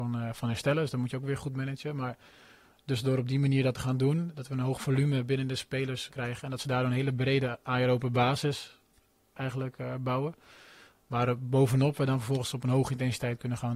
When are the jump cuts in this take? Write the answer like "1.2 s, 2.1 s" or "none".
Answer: 6.1 s